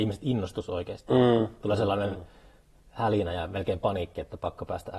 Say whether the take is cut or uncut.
uncut